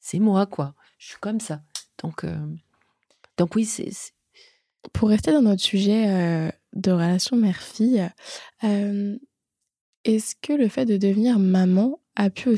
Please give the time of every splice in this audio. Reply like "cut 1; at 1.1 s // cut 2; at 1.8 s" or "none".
none

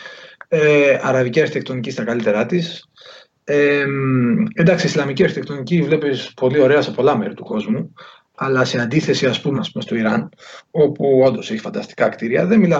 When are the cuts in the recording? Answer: cut 1; at 9.5 s

